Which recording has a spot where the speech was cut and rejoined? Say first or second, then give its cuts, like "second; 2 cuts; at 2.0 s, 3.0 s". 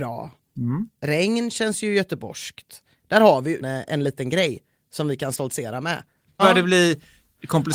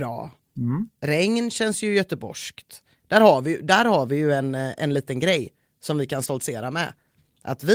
first; 2 cuts; at 3.6 s, 6.4 s